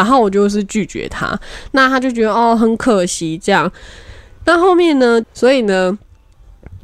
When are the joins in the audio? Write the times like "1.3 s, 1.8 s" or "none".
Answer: 5.2 s